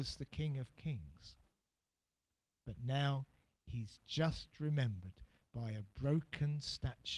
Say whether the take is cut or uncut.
uncut